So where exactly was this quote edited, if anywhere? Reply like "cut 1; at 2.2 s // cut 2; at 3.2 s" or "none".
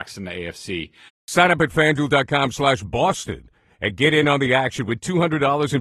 cut 1; at 1.2 s